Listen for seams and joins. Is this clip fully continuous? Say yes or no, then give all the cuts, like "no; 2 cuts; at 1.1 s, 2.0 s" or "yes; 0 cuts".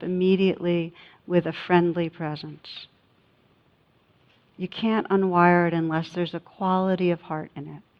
yes; 0 cuts